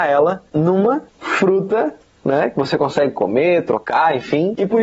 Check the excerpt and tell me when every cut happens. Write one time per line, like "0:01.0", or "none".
0:01.1